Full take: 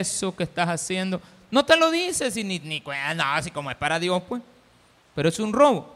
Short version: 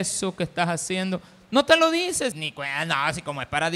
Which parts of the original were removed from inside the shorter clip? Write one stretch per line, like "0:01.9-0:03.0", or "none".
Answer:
0:02.3-0:02.6